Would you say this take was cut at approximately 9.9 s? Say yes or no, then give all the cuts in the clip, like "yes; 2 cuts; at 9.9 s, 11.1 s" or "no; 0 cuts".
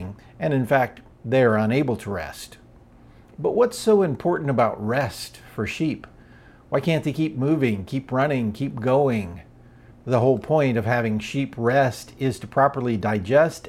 yes; 1 cut; at 9.9 s